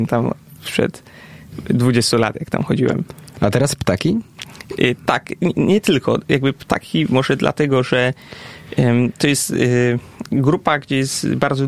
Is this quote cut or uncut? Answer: uncut